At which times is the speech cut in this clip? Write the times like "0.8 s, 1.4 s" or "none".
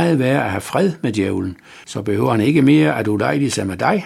1.8 s